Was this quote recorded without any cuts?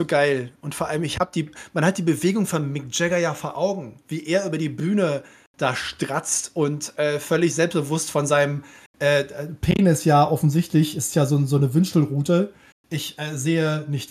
yes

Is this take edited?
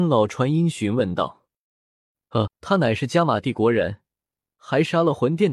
yes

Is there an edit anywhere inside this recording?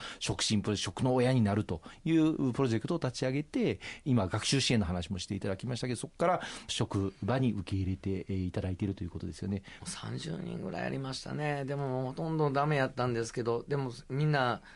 yes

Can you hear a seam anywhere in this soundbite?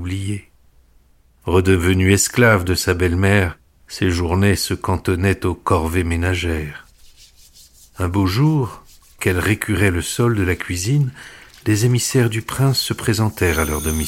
yes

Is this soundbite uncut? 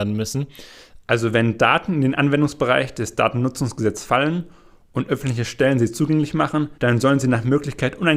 no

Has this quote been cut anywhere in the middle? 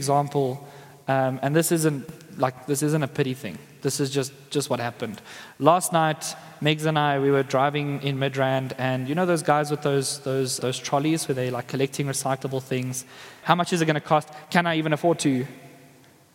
yes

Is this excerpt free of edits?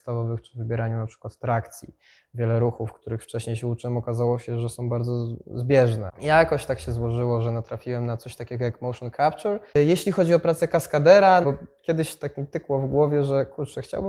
no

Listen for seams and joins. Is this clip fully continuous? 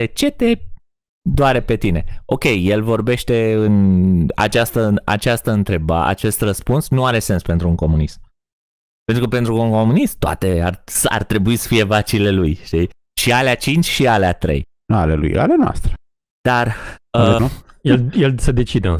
no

